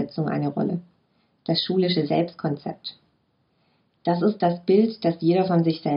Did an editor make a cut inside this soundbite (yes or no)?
no